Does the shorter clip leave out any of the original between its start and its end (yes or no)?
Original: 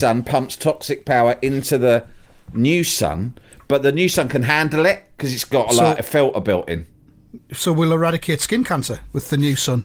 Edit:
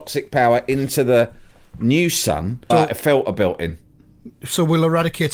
yes